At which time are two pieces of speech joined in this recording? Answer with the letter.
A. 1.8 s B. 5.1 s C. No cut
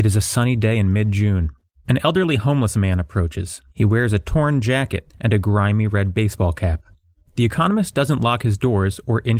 B